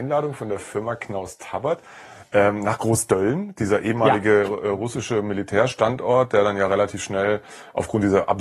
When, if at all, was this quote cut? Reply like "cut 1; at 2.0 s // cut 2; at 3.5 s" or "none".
none